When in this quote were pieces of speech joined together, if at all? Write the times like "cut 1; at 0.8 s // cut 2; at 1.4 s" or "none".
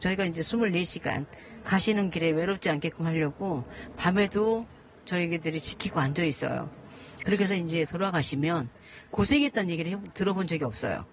none